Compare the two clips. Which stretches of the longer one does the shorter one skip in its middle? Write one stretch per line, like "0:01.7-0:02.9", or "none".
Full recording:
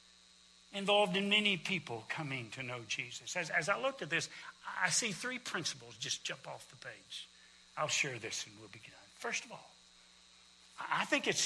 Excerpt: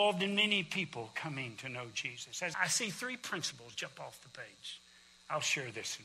0:03.5-0:04.8
0:06.0-0:06.2